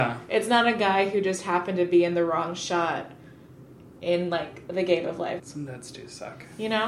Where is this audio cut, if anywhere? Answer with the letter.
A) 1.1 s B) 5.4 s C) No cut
B